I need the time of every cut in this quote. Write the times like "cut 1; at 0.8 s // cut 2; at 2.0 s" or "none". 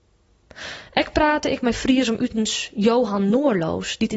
none